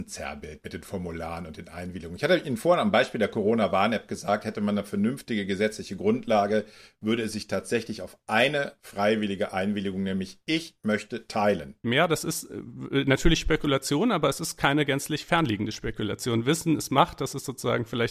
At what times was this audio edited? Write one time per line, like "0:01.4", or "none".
0:11.8